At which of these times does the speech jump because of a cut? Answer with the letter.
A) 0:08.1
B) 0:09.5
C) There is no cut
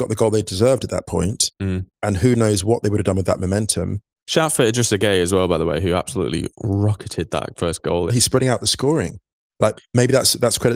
A